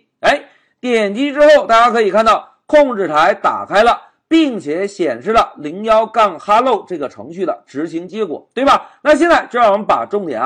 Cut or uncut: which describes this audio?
uncut